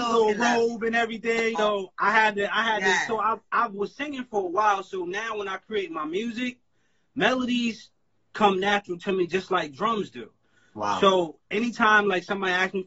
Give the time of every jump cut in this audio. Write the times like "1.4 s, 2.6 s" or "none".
1.5 s